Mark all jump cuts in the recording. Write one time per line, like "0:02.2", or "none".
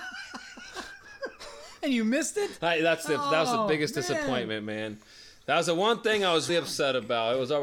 0:06.5